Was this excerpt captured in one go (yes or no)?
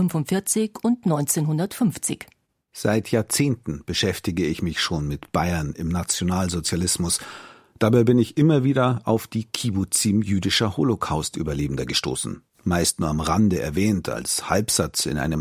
yes